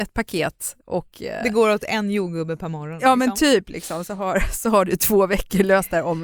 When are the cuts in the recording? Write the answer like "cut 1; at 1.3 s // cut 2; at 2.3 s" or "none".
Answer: none